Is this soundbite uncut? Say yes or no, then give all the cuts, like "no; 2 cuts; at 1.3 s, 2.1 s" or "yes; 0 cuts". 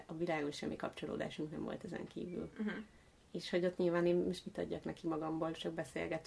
yes; 0 cuts